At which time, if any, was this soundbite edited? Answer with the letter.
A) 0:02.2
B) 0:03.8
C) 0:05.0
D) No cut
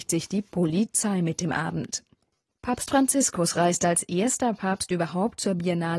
D